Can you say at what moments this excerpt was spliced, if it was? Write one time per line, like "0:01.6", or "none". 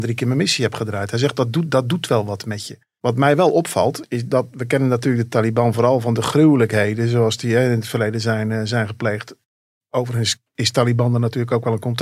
0:04.0